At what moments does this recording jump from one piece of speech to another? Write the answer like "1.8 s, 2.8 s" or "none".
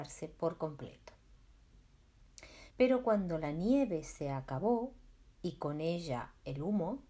2.7 s